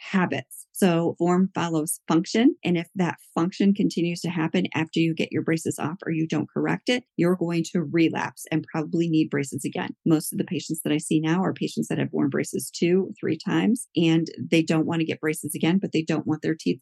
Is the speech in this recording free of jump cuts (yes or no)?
yes